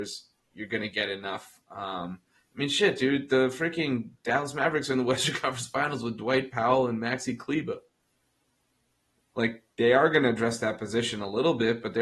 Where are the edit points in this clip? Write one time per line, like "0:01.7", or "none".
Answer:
none